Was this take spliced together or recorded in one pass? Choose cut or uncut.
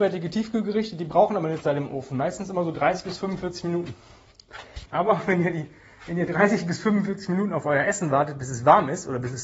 cut